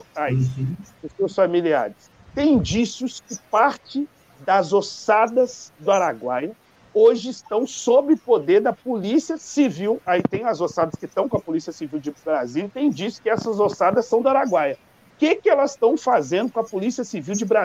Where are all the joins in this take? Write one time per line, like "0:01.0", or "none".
none

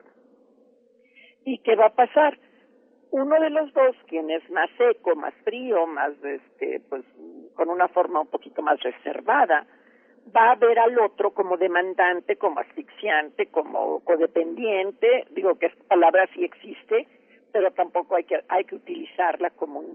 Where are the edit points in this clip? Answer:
none

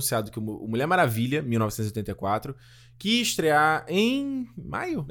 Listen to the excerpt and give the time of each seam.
none

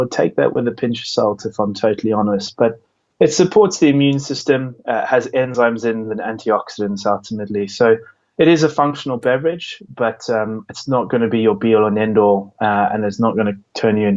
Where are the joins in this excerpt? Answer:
none

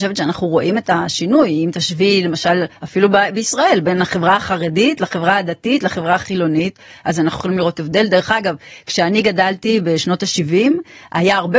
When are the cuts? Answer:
none

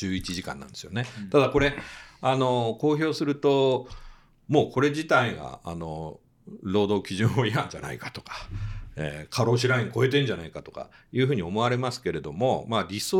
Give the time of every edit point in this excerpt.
none

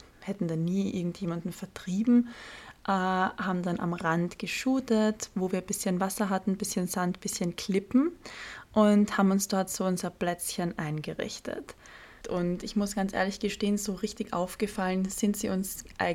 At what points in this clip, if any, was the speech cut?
0:12.2

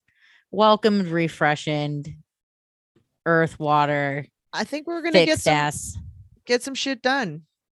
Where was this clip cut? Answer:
none

